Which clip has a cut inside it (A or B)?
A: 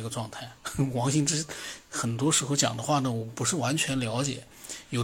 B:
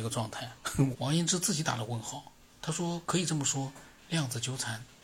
B